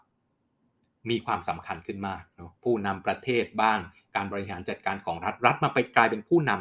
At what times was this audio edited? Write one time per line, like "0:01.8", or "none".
0:02.6